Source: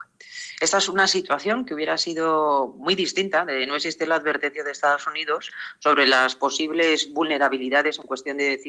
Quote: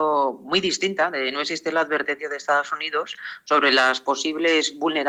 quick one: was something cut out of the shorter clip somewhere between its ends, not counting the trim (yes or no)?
no